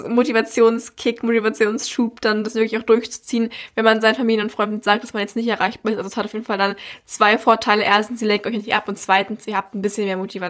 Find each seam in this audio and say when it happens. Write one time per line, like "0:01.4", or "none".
none